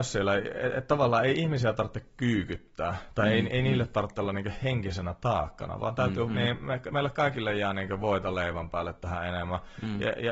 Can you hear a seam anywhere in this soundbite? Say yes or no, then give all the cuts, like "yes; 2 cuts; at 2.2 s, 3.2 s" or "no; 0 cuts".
yes; 1 cut; at 6.3 s